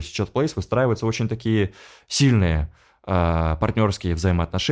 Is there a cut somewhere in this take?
no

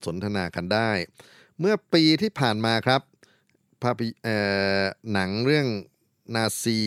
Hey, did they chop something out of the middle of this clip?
no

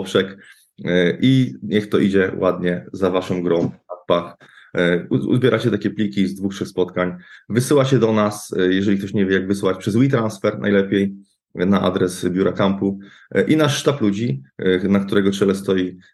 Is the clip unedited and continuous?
yes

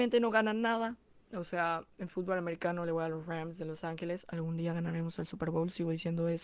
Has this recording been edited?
no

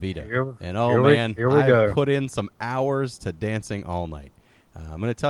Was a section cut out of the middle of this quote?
no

